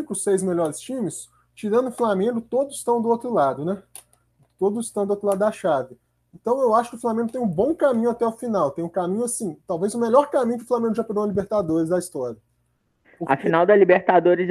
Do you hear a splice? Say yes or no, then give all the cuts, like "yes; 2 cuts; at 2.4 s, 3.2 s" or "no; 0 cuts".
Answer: no; 0 cuts